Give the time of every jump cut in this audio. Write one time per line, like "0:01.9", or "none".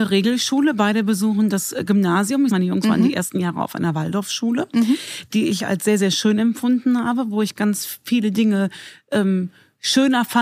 0:02.5